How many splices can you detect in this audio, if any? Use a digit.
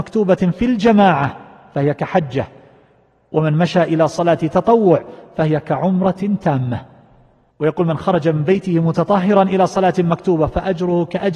0